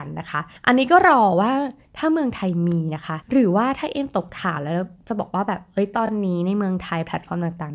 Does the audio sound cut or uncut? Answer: uncut